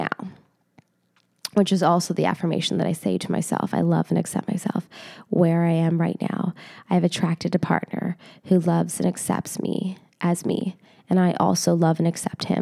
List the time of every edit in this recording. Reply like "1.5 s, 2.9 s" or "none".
none